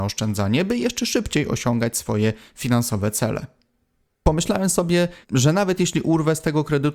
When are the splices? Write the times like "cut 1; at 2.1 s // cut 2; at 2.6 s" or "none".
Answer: cut 1; at 4.1 s // cut 2; at 5.2 s